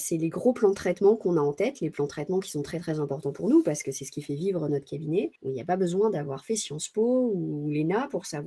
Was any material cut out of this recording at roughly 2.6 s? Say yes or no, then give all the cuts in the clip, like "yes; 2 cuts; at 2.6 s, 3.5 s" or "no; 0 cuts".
no; 1 cut; at 5.4 s